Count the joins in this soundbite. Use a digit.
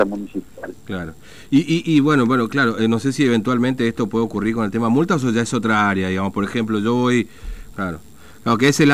1